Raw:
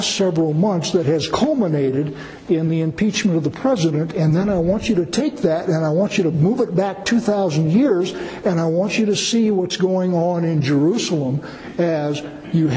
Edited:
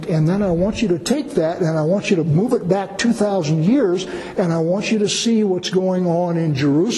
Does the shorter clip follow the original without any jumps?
yes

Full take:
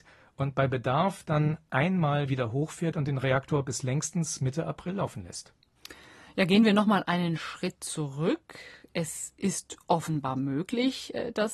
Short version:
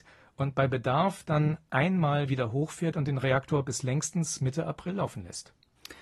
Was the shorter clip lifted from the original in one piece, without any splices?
yes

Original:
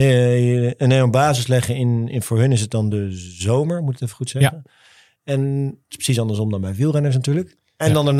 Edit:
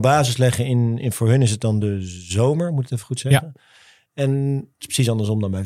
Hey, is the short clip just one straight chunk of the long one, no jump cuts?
yes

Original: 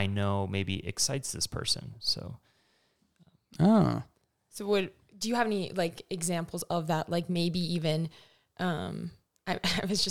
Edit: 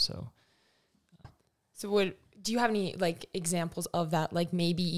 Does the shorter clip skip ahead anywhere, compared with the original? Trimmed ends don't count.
yes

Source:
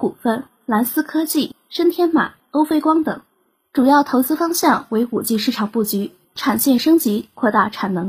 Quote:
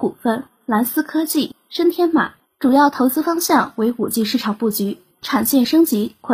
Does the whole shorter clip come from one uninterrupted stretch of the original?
no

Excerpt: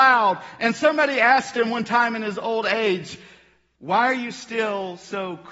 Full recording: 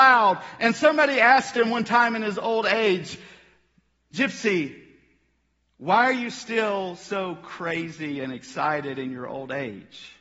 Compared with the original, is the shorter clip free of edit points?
no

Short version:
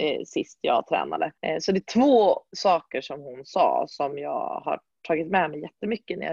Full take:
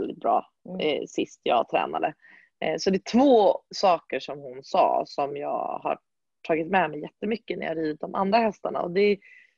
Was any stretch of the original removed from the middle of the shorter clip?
yes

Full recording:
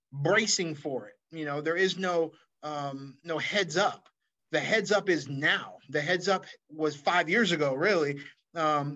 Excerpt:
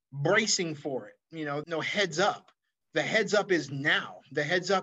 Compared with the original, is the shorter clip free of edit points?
no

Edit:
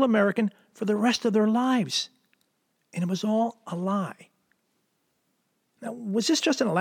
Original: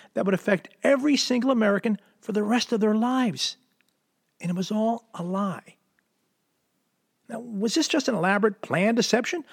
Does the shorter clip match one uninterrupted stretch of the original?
yes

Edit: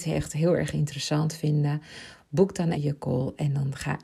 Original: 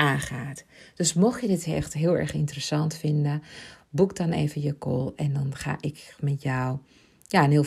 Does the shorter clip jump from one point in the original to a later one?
yes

